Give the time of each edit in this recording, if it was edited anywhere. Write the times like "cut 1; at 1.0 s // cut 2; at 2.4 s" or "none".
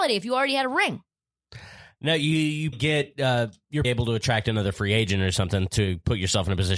cut 1; at 2.7 s // cut 2; at 3.8 s